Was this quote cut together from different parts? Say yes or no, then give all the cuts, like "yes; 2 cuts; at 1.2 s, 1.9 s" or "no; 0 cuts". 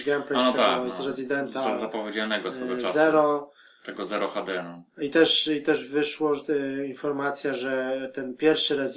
no; 0 cuts